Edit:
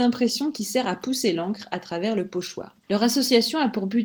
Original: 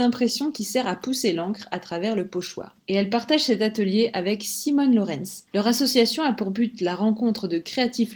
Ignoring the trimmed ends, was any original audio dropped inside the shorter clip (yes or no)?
yes